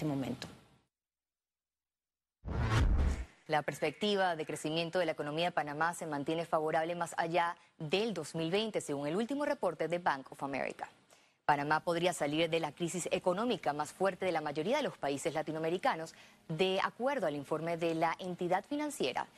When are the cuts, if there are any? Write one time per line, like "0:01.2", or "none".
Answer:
0:03.5